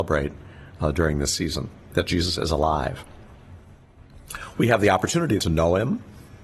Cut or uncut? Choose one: cut